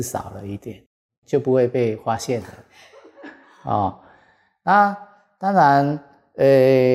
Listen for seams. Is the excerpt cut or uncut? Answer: cut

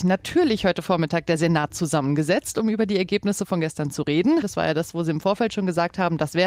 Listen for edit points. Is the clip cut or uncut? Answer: cut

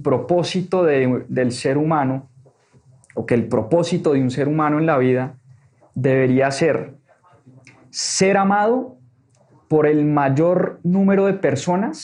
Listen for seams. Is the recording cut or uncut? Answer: uncut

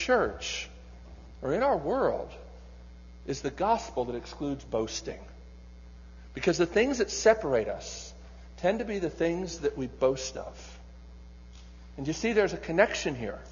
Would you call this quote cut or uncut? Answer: uncut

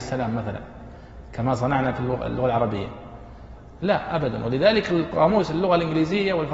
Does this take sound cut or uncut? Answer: uncut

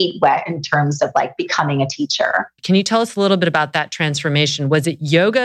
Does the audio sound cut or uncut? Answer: cut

